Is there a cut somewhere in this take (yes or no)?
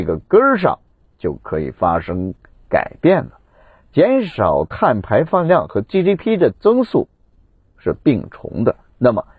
no